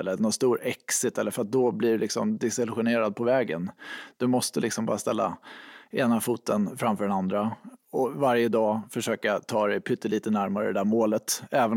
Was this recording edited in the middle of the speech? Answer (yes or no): no